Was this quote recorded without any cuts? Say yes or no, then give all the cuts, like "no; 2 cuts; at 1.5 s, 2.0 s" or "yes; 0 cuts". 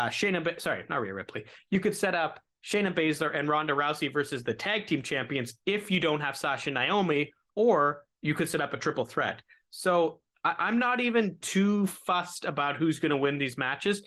no; 1 cut; at 7.5 s